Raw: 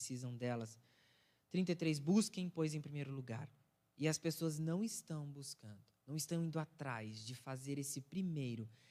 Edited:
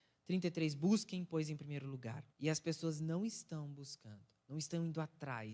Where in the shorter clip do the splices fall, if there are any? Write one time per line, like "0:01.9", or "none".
0:02.3